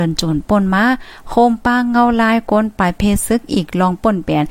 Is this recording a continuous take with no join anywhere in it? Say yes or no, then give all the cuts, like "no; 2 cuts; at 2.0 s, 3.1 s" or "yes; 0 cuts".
yes; 0 cuts